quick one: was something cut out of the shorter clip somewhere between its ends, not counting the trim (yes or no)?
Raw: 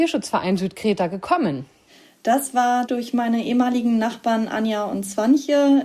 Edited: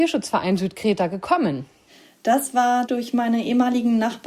no